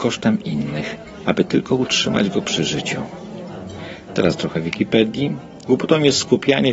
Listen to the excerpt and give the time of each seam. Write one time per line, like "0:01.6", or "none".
0:04.1
0:05.6

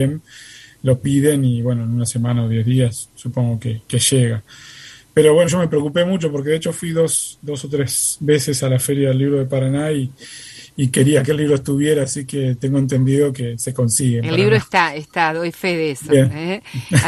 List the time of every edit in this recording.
0:05.5

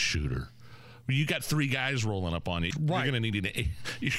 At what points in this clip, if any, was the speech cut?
0:02.7

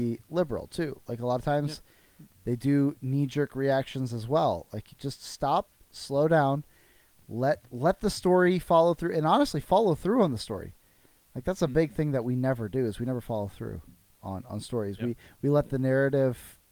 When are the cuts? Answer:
none

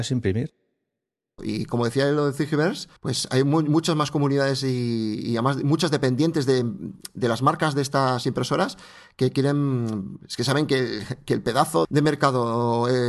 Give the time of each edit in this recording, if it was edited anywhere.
0:01.4
0:03.0
0:11.8

